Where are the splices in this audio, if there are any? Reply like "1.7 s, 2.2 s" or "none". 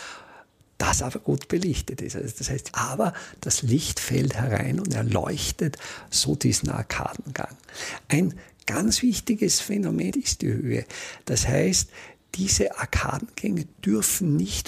2.7 s, 10.1 s

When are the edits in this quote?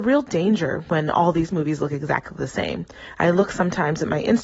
none

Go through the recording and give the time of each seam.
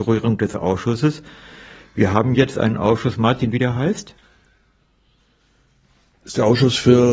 3.5 s

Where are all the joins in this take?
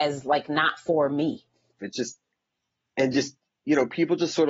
1.8 s

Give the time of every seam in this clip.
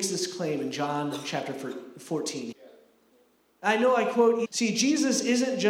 2.5 s, 4.5 s

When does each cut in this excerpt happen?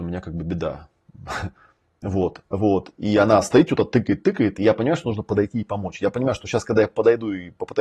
2.4 s

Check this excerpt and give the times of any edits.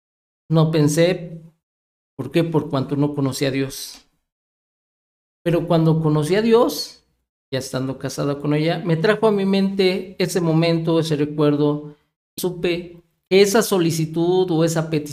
12.4 s

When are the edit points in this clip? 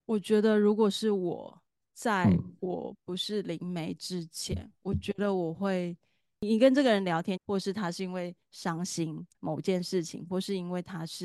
7.4 s, 9.3 s

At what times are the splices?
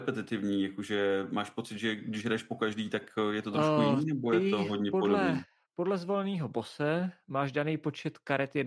none

